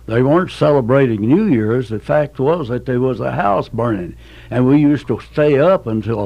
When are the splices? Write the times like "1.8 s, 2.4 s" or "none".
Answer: none